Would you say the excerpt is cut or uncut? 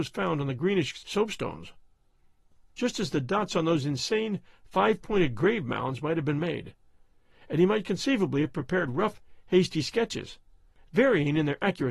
uncut